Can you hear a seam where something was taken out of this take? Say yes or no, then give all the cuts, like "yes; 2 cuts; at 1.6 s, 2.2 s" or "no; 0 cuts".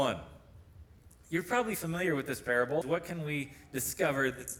yes; 1 cut; at 2.8 s